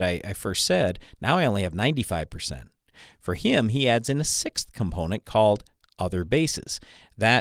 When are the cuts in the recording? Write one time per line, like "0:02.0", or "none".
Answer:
0:03.1